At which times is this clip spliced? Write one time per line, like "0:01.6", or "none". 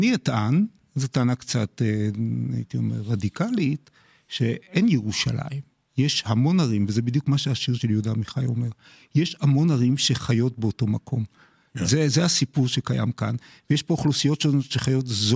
none